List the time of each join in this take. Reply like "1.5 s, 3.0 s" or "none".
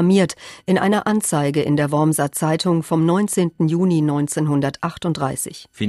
none